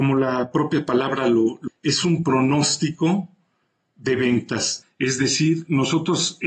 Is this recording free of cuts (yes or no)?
no